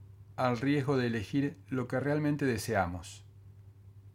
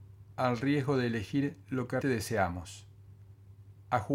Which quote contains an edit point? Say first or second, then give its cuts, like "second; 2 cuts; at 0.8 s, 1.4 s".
second; 1 cut; at 2.0 s